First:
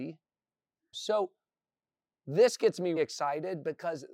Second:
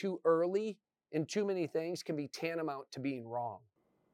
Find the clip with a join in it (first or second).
first